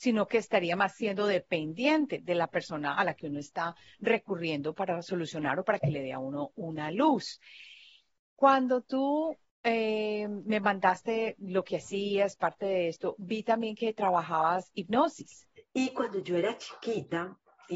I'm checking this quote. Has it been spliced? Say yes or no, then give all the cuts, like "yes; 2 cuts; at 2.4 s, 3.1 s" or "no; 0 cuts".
yes; 1 cut; at 15.6 s